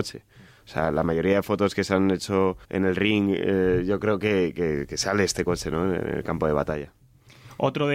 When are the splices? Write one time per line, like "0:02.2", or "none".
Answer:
0:02.6

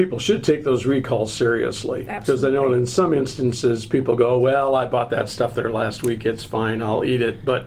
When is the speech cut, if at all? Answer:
none

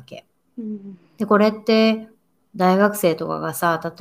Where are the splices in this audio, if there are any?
0:01.2

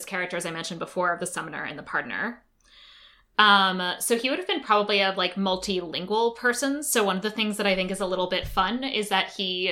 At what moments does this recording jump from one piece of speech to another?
none

